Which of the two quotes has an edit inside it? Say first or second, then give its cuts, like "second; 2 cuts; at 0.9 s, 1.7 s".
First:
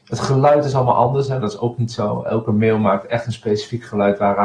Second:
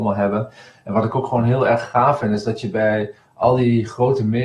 first; 1 cut; at 1.4 s